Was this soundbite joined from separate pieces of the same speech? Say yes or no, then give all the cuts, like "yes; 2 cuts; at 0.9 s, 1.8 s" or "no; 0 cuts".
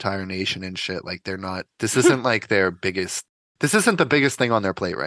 no; 0 cuts